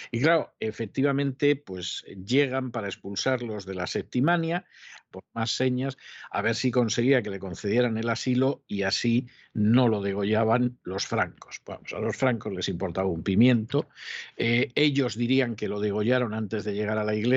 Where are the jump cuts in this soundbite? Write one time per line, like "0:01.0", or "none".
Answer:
0:05.1